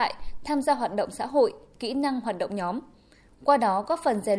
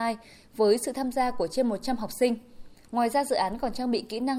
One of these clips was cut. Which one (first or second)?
second